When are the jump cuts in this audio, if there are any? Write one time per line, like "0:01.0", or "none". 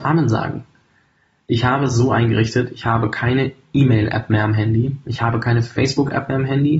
none